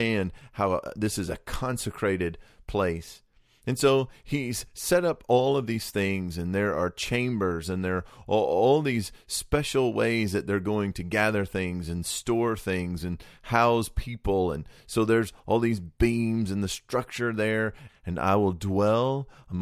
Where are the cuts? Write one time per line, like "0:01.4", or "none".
0:17.9